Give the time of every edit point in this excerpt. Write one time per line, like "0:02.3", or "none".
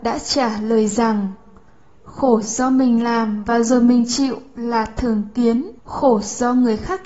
0:05.8